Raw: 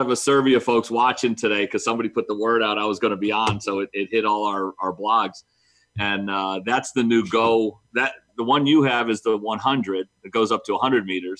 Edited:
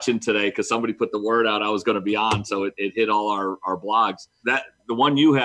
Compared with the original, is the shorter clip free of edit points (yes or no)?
no